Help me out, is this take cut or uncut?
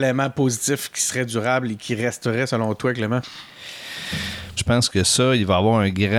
cut